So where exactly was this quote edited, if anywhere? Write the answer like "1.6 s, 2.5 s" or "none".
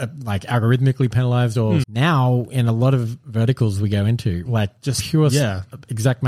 1.8 s, 4.5 s